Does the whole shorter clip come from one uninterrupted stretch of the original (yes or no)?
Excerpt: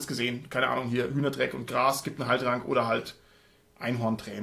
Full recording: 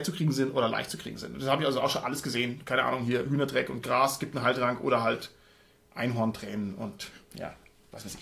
yes